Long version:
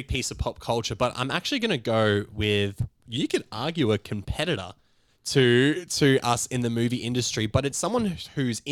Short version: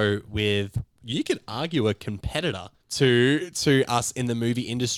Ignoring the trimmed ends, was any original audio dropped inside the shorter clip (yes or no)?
yes